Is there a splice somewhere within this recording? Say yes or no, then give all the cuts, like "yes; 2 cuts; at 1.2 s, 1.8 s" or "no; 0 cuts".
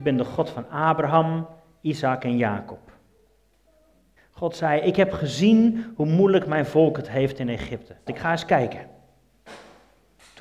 yes; 2 cuts; at 4.2 s, 8.1 s